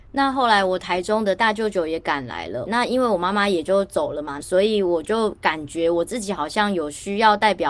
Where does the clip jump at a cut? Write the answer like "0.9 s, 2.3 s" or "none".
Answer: 2.7 s, 4.4 s